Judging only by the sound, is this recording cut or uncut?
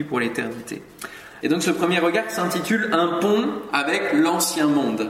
cut